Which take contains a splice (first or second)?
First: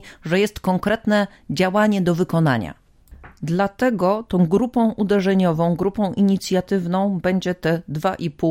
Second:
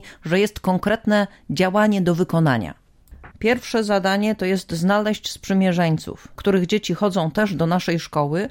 second